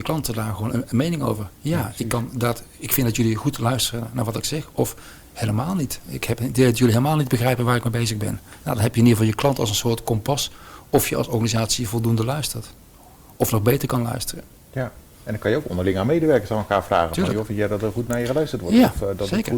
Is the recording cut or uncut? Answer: uncut